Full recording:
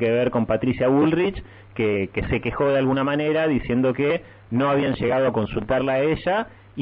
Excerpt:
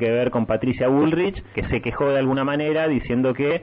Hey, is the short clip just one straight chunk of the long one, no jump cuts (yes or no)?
no